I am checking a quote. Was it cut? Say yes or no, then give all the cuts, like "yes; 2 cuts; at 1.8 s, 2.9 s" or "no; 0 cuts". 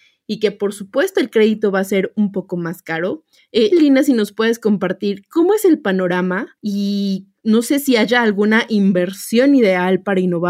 yes; 1 cut; at 3.7 s